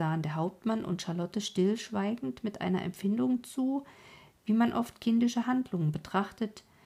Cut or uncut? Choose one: uncut